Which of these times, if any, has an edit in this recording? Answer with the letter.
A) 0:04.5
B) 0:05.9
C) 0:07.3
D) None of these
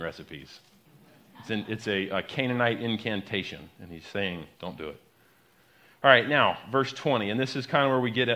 A